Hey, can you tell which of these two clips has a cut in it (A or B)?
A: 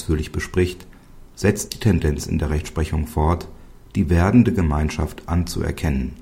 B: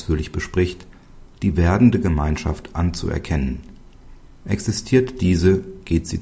B